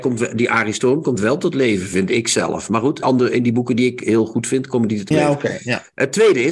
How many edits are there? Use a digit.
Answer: 2